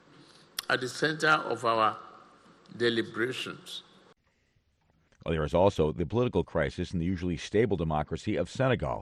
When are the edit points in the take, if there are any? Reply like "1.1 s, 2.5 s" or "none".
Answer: 5.1 s

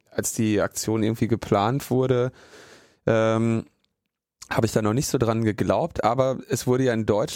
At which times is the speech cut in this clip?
none

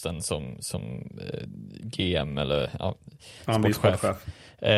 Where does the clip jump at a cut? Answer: none

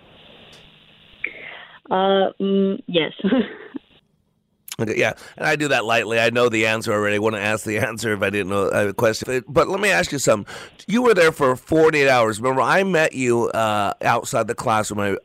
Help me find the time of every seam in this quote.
9.2 s

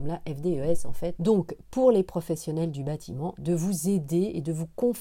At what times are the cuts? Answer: 1.2 s, 3.4 s

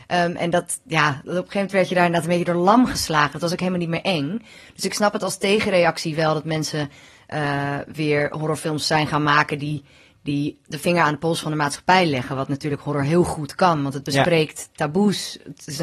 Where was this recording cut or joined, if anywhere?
none

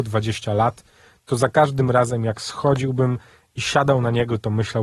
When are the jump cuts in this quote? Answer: none

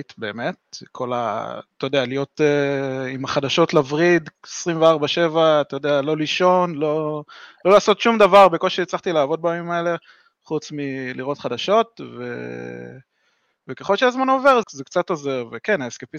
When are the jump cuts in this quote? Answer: 14.6 s

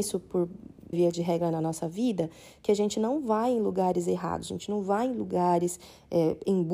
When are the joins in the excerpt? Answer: 0.9 s

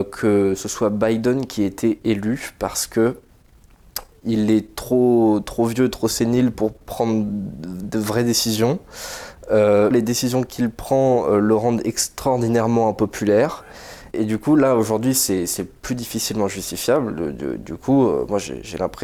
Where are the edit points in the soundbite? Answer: 4.1 s, 9.9 s, 14.1 s

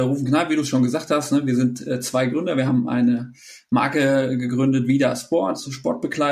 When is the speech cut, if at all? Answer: none

